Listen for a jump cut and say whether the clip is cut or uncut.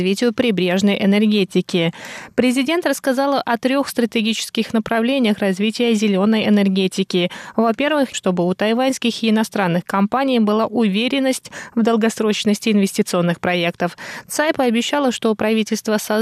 cut